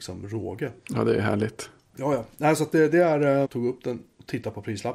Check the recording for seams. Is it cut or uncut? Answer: cut